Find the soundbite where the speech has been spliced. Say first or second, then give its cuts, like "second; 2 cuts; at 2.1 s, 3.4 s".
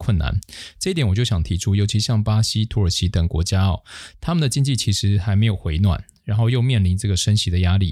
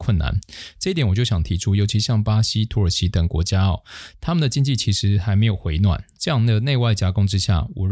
second; 1 cut; at 6.2 s